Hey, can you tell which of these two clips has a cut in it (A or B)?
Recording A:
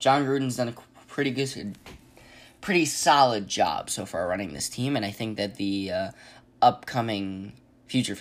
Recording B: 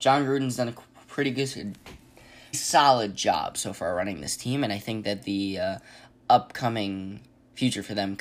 B